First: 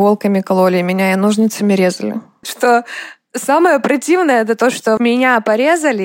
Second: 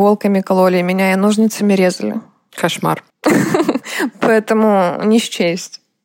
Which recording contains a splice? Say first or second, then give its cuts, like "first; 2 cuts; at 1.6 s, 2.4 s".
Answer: first; 2 cuts; at 2.4 s, 5.0 s